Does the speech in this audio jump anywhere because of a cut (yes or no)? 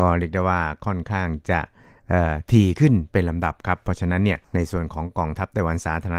yes